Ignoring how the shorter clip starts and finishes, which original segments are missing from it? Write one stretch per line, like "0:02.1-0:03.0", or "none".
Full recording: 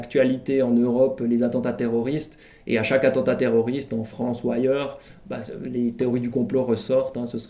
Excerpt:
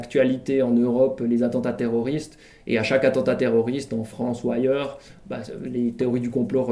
none